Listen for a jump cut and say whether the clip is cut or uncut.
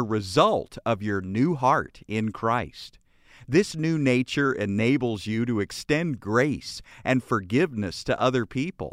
uncut